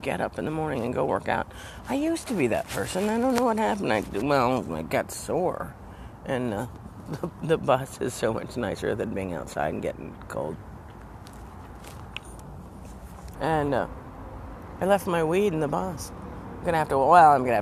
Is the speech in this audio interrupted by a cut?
yes; 1 cut; at 13.3 s

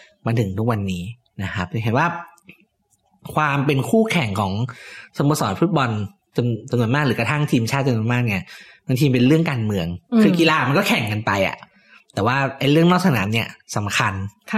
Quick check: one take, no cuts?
yes; 0 cuts

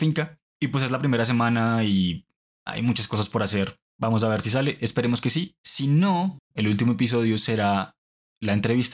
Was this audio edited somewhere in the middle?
no; 0 cuts

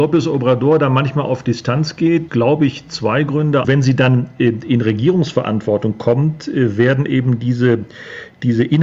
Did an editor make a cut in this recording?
yes; 2 cuts; at 2.3 s, 3.6 s

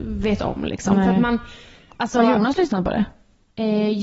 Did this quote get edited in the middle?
no; 0 cuts

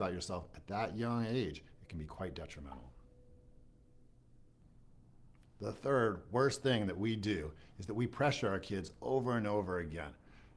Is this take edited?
no; 0 cuts

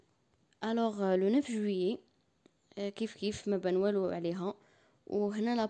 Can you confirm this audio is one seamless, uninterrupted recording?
yes; 0 cuts

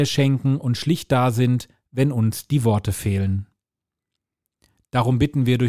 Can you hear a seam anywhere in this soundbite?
no; 0 cuts

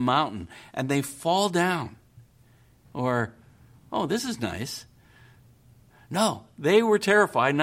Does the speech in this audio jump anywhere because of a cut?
yes; 1 cut; at 2.8 s

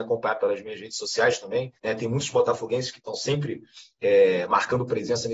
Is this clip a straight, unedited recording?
no; 1 cut; at 1.8 s

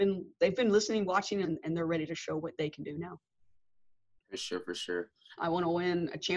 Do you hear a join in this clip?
yes; 2 cuts; at 1.4 s, 5.4 s

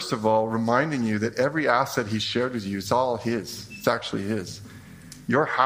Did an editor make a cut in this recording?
no; 0 cuts

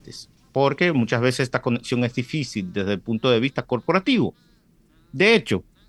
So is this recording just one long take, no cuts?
yes; 0 cuts

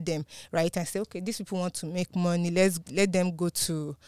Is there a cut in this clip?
no; 0 cuts

